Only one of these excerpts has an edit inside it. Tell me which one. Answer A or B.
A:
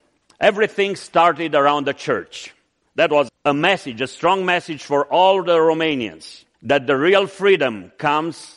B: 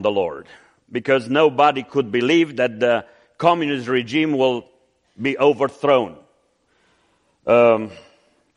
A